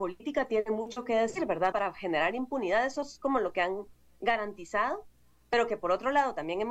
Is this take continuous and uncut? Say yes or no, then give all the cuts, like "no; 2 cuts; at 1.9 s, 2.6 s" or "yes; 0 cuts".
no; 1 cut; at 1.7 s